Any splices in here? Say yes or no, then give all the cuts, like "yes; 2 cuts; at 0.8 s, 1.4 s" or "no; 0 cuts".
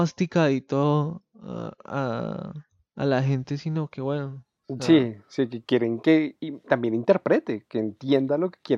no; 0 cuts